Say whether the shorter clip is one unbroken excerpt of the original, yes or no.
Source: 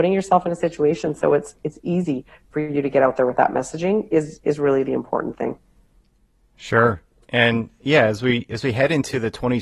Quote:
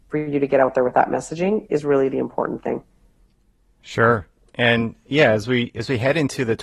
no